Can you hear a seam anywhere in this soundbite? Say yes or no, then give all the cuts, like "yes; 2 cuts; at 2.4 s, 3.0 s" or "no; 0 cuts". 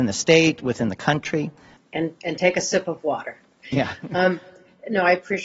yes; 1 cut; at 1.8 s